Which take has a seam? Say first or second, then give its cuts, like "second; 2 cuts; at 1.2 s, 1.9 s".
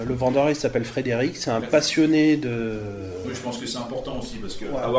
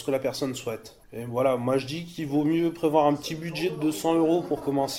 second; 1 cut; at 1.0 s